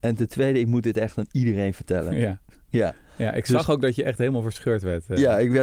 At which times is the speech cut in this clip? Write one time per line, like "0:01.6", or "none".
none